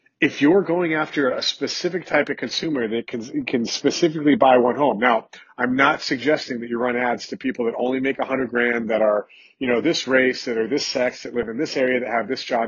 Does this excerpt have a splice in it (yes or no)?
no